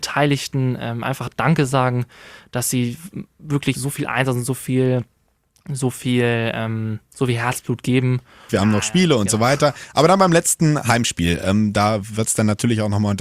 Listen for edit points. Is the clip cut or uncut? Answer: cut